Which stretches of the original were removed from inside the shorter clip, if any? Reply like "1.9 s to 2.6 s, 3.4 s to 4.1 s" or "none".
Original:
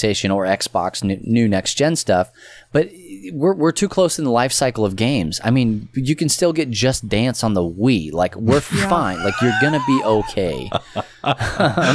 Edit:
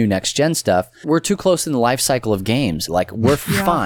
2.4 s to 3.6 s, 5.4 s to 8.1 s